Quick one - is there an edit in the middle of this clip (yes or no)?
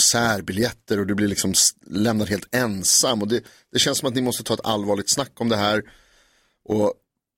no